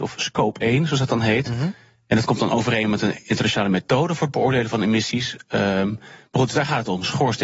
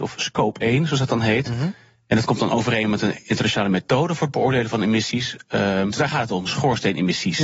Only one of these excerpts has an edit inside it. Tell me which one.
second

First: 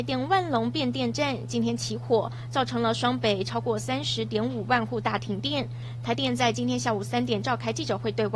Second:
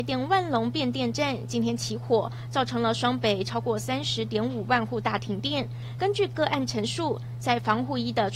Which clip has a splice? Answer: second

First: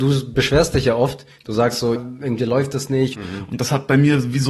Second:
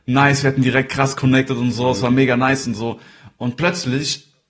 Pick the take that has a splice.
first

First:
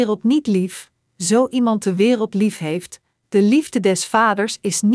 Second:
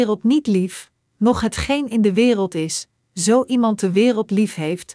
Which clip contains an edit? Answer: first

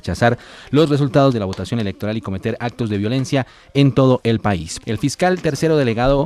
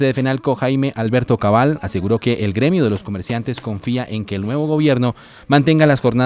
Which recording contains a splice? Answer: first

